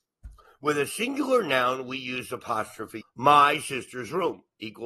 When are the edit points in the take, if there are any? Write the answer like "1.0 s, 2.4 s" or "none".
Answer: 3.0 s